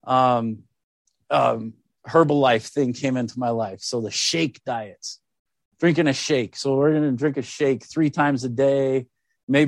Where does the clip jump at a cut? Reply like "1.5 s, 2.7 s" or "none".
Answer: none